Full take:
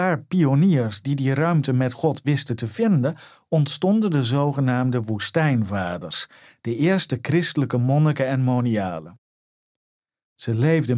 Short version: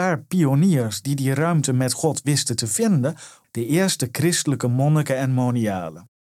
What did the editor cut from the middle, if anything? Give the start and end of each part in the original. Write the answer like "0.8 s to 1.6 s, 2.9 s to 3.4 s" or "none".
3.4 s to 6.5 s